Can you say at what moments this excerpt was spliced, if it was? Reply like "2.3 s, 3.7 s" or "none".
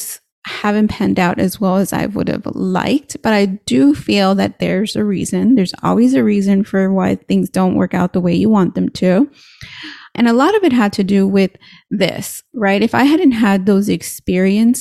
none